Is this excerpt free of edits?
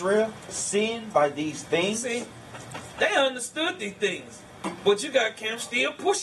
yes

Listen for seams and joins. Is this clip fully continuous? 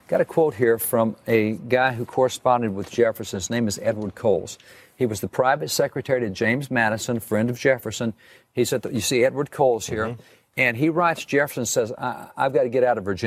yes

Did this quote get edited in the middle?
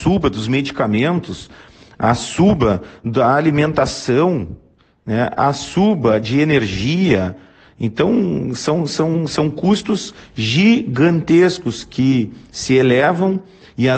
no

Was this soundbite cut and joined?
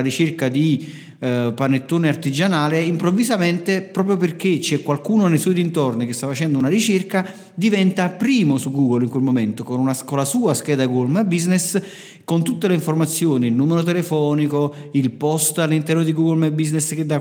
no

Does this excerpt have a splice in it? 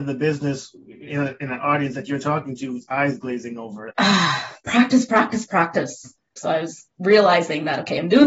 yes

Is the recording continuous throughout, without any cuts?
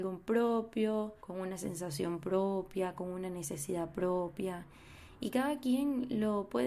no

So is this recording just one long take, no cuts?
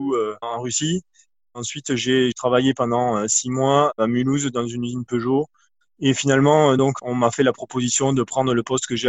yes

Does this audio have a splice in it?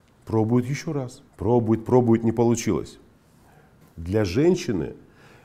yes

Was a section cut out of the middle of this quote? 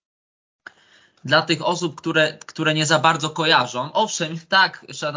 no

